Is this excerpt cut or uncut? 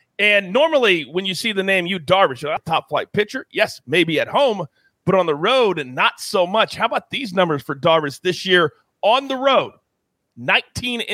cut